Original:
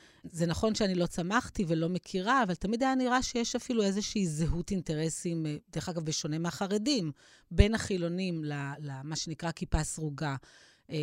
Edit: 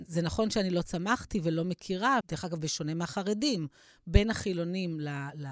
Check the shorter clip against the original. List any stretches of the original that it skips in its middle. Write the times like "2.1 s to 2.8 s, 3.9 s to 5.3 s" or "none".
2.4 s to 5.6 s